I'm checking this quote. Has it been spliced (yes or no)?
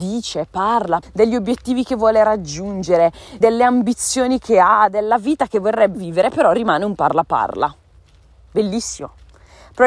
yes